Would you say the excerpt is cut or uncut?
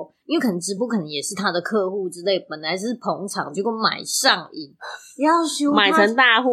uncut